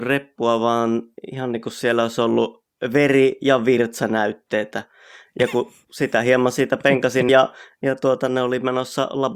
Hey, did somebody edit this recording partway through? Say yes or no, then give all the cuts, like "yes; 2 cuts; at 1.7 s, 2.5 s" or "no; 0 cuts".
yes; 1 cut; at 7.3 s